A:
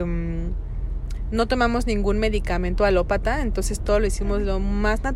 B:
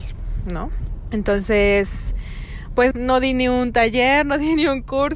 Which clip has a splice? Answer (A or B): B